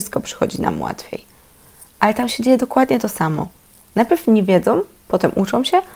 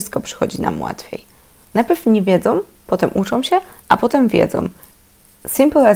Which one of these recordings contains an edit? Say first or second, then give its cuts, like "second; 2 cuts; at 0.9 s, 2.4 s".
second; 1 cut; at 1.6 s